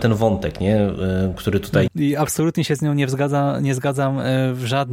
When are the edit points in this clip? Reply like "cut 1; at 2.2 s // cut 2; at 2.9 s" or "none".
cut 1; at 1.9 s